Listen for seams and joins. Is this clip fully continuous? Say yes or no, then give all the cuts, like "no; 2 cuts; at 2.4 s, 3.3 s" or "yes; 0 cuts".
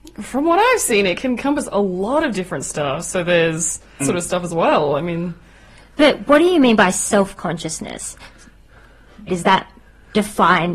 no; 2 cuts; at 4.0 s, 9.3 s